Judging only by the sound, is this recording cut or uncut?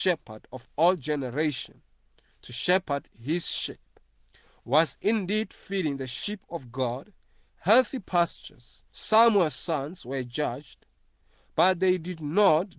cut